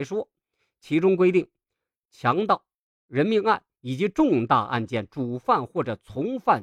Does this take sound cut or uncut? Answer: uncut